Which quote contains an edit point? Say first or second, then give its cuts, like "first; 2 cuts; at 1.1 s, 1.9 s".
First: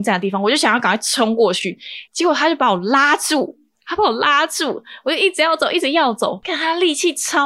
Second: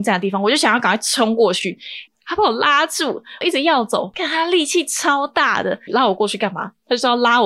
second; 3 cuts; at 2.1 s, 3.4 s, 5.9 s